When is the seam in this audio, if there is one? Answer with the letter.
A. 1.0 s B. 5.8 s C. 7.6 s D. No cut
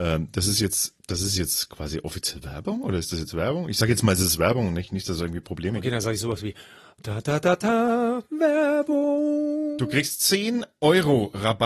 A